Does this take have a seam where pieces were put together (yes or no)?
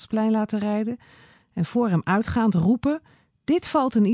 no